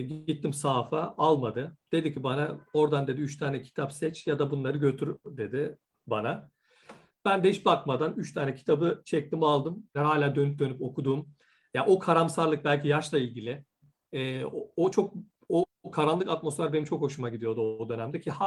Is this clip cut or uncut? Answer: cut